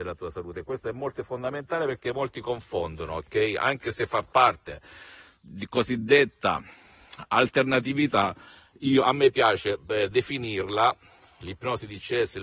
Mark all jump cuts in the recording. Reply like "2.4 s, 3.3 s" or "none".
none